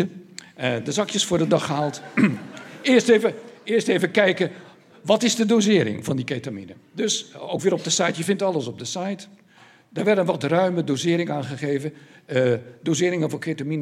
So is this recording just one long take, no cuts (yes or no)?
yes